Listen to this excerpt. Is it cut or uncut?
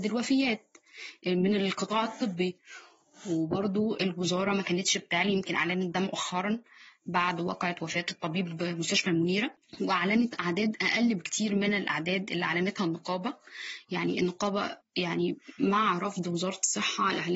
uncut